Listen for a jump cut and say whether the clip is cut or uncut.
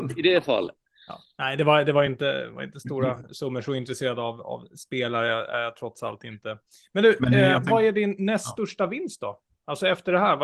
uncut